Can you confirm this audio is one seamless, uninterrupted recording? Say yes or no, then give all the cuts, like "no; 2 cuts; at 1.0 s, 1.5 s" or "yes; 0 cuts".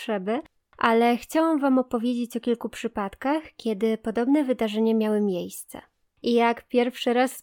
no; 1 cut; at 6.1 s